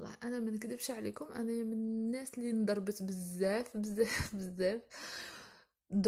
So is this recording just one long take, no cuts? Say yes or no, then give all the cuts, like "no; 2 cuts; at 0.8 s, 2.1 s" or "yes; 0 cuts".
yes; 0 cuts